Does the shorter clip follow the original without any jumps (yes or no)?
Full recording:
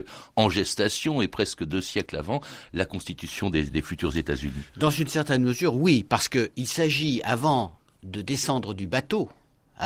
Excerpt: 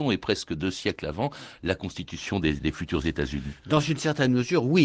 yes